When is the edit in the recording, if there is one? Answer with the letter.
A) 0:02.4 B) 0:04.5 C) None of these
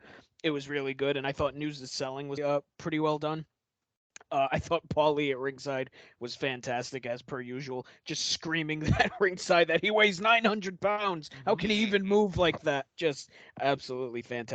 A